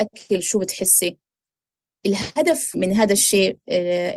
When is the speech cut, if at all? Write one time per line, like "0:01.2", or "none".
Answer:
0:02.7